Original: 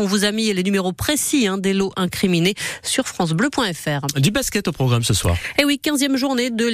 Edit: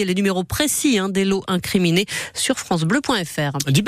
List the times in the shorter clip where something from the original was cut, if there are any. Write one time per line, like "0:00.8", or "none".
none